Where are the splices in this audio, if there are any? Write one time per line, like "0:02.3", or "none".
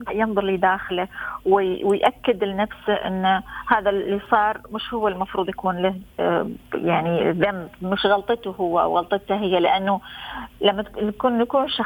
none